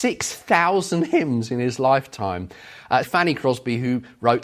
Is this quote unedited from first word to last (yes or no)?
no